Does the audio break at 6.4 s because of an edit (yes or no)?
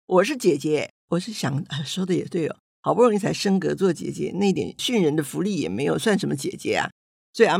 no